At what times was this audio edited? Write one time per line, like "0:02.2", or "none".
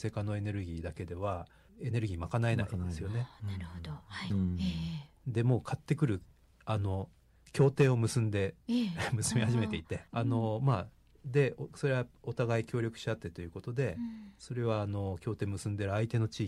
0:04.3
0:10.1